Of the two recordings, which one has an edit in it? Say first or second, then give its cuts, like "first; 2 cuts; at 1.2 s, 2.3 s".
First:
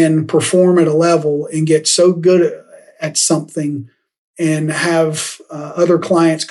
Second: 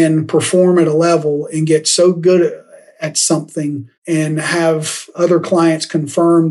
second; 2 cuts; at 4.0 s, 5.1 s